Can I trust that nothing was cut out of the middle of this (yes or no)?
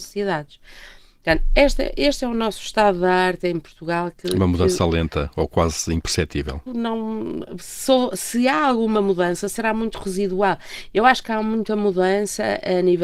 no